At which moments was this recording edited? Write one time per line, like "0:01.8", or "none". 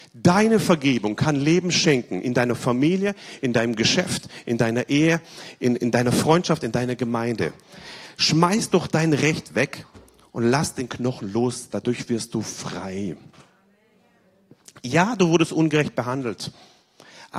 none